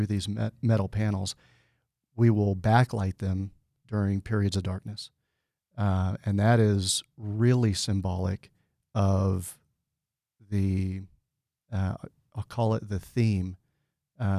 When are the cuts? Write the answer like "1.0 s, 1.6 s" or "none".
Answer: none